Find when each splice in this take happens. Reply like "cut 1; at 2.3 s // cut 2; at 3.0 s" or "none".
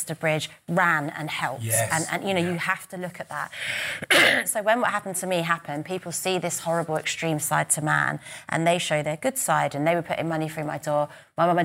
none

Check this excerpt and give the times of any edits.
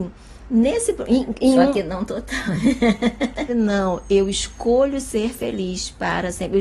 cut 1; at 3.5 s

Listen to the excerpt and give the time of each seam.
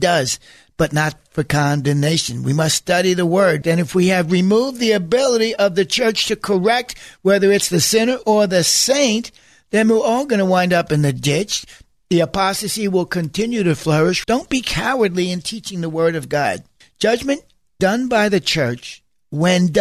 cut 1; at 3.6 s // cut 2; at 14.2 s

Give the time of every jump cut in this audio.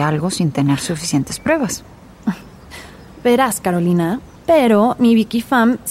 cut 1; at 4.4 s

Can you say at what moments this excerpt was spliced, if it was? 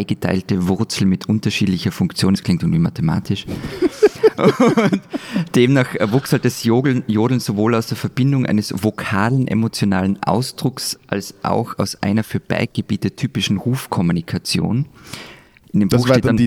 none

